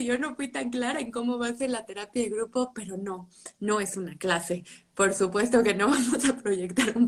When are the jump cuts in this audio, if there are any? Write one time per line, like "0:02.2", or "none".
none